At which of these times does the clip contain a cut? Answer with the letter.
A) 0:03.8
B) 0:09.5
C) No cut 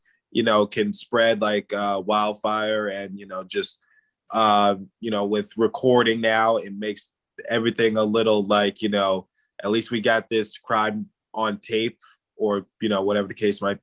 C